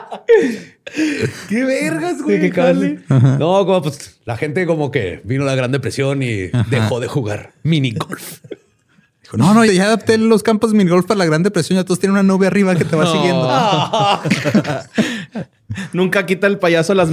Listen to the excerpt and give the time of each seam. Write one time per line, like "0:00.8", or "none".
0:09.7